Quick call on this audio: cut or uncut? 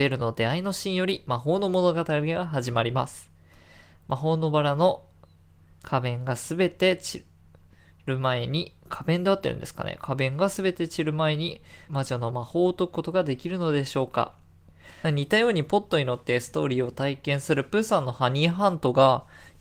cut